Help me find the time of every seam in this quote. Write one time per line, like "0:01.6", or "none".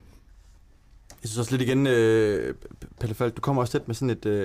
none